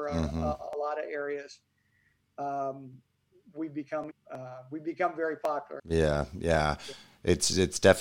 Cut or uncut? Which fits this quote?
cut